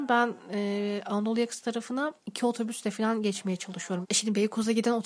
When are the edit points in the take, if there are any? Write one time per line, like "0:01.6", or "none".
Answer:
0:02.2
0:04.0